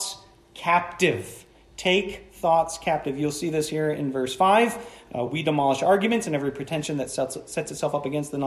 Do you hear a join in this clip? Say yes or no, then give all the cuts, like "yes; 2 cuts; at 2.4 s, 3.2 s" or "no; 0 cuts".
no; 0 cuts